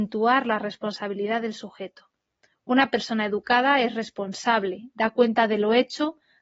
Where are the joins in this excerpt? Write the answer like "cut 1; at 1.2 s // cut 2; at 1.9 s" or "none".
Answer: none